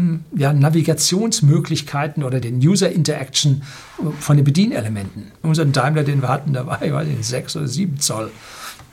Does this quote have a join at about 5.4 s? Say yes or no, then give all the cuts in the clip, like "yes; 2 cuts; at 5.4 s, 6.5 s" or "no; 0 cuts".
yes; 2 cuts; at 2.4 s, 5.4 s